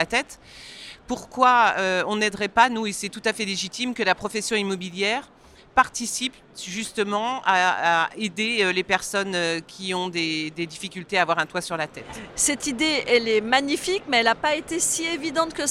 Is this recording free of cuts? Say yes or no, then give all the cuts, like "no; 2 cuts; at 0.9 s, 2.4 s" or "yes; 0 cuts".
yes; 0 cuts